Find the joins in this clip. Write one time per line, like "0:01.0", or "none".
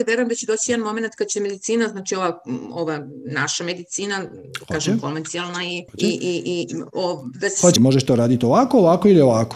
0:05.9
0:07.8